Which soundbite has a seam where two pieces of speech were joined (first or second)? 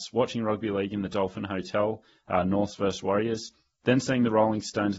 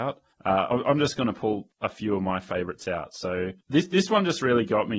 second